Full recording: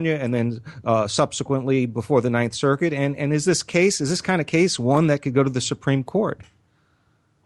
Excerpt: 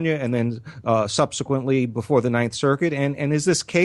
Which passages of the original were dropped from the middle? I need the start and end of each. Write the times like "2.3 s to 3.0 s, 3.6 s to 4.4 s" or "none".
none